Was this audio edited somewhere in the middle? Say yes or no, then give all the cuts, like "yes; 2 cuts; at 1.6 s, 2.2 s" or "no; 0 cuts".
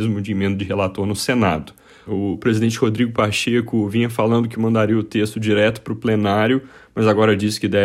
yes; 1 cut; at 2.1 s